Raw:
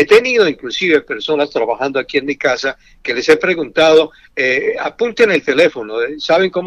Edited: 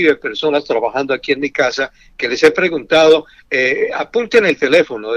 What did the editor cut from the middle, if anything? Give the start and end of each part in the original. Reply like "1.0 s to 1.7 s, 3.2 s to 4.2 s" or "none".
none